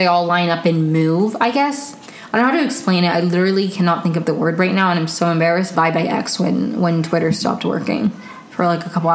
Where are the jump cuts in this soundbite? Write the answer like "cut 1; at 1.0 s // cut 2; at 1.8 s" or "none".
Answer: cut 1; at 5.7 s